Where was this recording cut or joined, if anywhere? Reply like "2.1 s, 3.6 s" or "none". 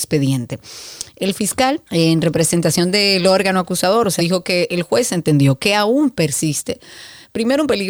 1.9 s, 4.2 s

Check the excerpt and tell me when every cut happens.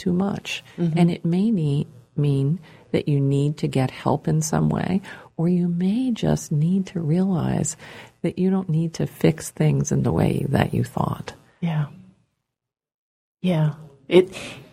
none

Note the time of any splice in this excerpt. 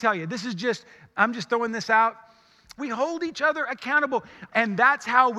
2.8 s, 4.5 s

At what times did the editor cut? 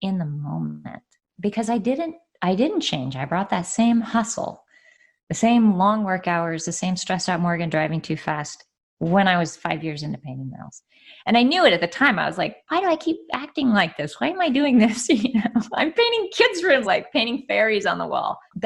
16.8 s

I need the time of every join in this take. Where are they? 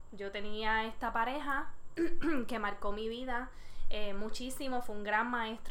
none

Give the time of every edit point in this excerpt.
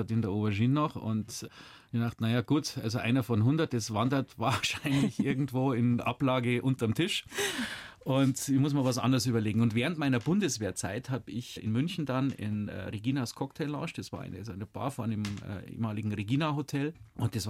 none

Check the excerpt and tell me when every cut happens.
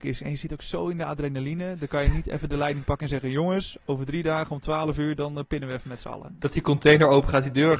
none

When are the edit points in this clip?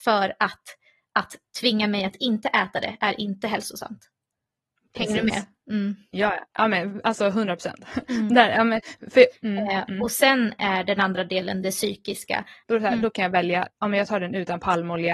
9.3 s, 12.6 s

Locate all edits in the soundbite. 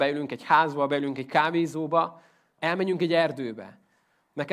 2.6 s

